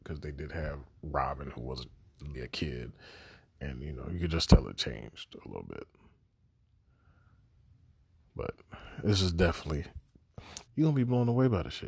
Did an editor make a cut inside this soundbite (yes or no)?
yes